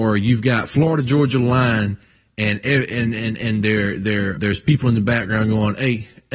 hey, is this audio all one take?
no; 1 cut; at 4.4 s

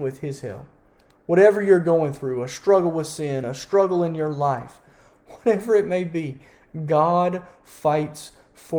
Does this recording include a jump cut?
no; 0 cuts

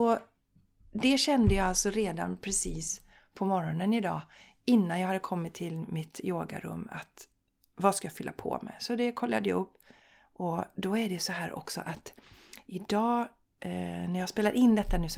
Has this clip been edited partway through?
no; 0 cuts

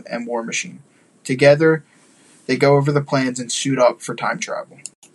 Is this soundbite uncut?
yes; 0 cuts

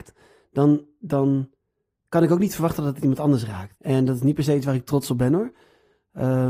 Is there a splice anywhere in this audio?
yes; 1 cut; at 3.7 s

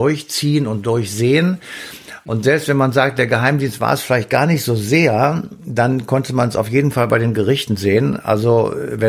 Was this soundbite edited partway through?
no; 0 cuts

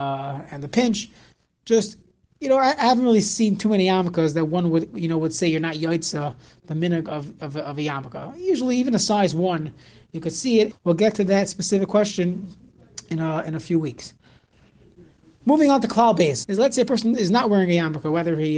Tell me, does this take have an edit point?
yes; 2 cuts; at 10.7 s, 16.4 s

